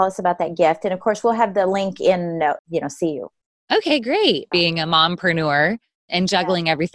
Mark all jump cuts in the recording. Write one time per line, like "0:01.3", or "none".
0:02.6
0:04.5

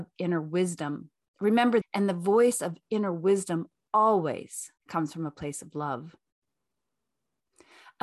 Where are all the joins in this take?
0:01.8
0:04.8

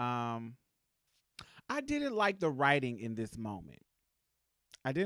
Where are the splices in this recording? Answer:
none

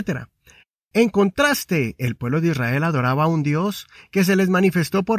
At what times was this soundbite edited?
0:00.9

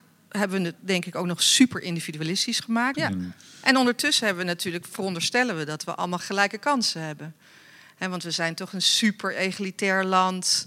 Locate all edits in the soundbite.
0:02.9

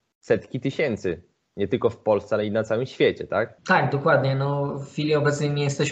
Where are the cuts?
0:03.6

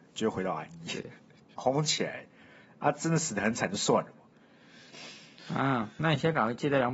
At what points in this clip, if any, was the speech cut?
0:01.6

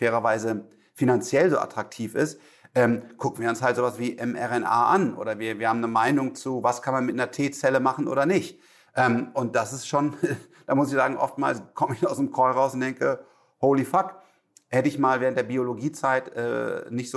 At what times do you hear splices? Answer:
none

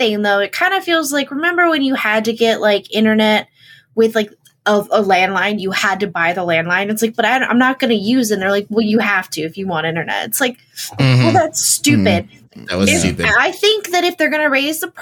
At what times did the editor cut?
none

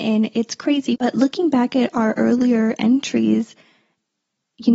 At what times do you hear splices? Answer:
0:00.9

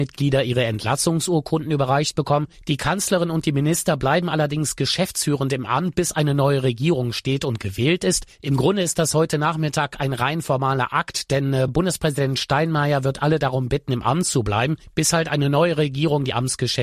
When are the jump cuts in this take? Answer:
none

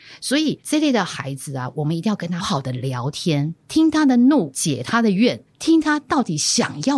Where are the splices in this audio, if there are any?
0:02.4

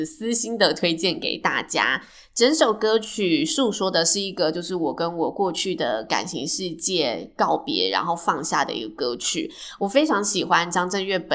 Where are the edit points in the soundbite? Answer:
none

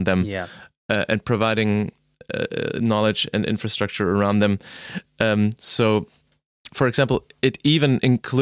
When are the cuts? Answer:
0:06.7

